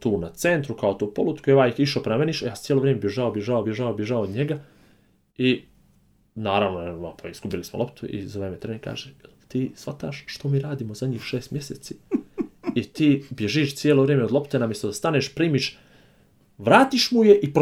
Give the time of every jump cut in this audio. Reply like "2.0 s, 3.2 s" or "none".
3.6 s